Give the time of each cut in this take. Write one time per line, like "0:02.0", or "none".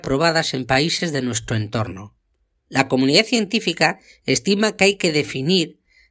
0:02.6